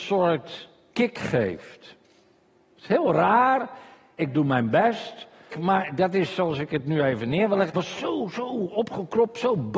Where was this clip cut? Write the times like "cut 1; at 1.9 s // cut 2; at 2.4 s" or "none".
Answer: cut 1; at 4.2 s // cut 2; at 5.5 s // cut 3; at 7.7 s